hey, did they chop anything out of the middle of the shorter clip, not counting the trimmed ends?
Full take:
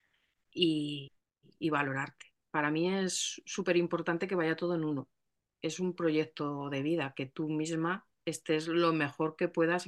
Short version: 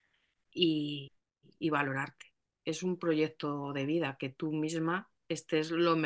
yes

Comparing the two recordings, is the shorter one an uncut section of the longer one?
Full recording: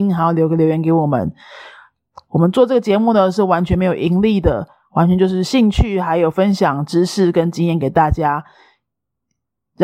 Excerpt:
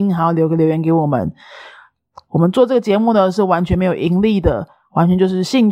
yes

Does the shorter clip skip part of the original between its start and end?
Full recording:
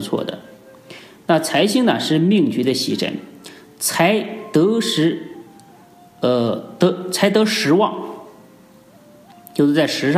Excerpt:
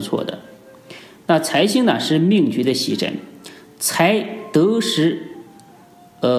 no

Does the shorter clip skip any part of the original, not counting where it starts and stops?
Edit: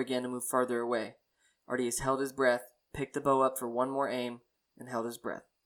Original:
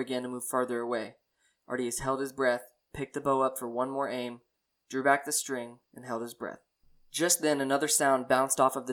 yes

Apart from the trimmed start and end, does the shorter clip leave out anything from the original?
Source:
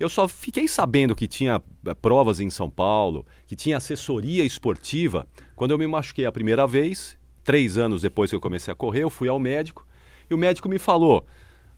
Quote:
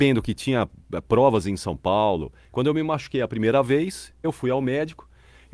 yes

